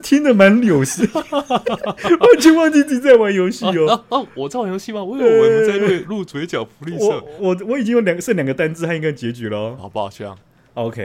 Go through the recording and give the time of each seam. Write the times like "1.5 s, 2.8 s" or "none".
7.4 s, 9.8 s